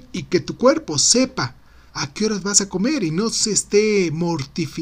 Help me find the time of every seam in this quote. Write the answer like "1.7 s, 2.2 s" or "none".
1.9 s